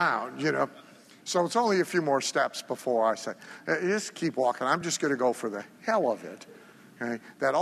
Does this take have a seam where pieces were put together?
no; 0 cuts

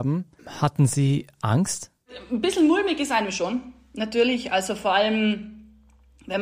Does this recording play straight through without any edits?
yes; 0 cuts

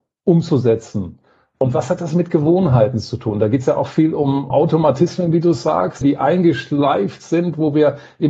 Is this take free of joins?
no; 2 cuts; at 4.5 s, 6.0 s

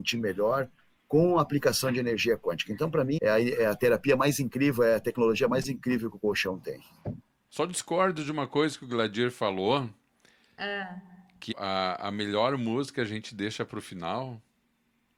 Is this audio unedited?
no; 3 cuts; at 3.2 s, 7.5 s, 11.5 s

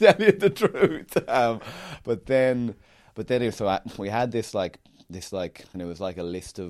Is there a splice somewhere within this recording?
yes; 1 cut; at 5.7 s

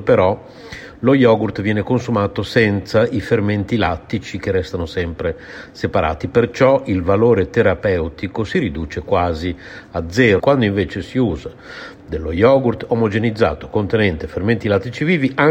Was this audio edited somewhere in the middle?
yes; 1 cut; at 10.4 s

